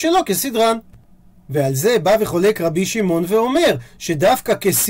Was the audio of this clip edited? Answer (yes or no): no